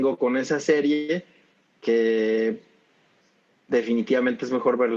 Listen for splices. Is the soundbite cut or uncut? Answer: uncut